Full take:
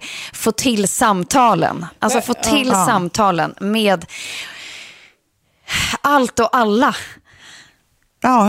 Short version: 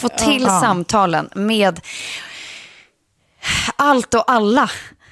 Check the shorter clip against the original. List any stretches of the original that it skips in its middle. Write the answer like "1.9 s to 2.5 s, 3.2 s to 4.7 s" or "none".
none